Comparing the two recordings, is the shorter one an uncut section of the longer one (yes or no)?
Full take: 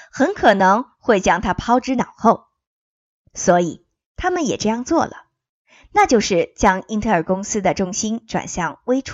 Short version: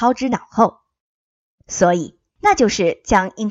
no